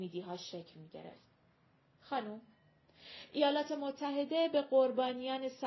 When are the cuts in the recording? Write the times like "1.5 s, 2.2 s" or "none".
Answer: none

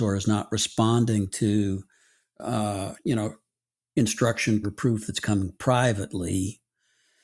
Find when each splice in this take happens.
4.6 s

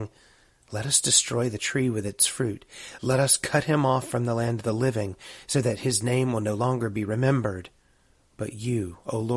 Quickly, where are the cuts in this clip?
none

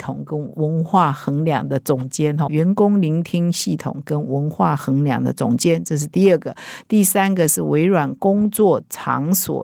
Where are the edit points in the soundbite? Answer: 2.5 s

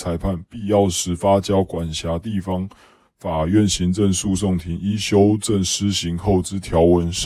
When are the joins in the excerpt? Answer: none

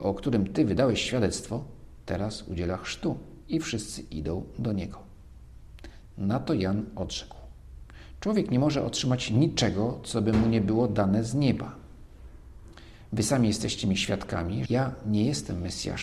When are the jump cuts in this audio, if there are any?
14.7 s

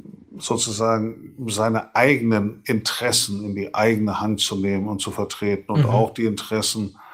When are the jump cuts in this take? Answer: none

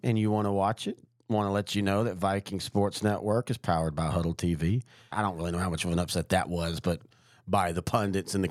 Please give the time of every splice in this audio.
5.1 s

